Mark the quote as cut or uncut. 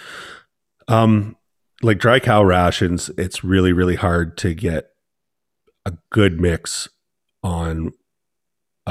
uncut